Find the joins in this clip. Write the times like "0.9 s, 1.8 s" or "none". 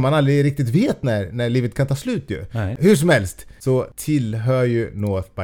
2.8 s